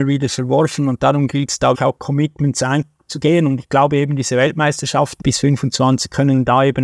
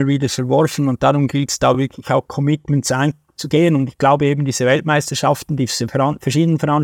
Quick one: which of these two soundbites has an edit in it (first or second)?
first